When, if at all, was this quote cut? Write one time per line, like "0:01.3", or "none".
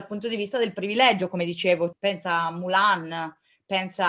0:01.9